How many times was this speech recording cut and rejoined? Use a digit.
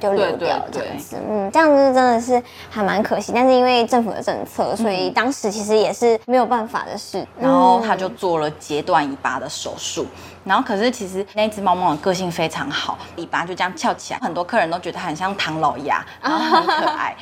2